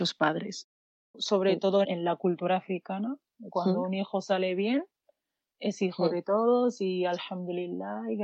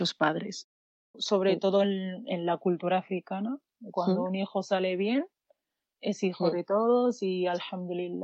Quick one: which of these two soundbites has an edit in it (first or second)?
first